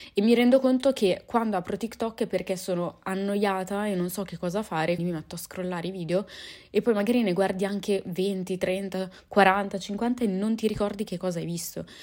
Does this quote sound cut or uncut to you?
cut